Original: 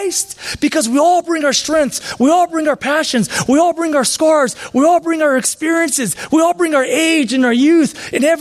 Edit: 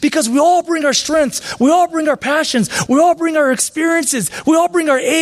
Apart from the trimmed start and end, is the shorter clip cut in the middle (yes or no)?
yes